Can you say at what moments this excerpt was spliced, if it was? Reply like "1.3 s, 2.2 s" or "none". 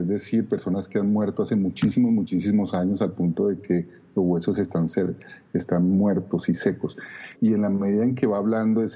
7.4 s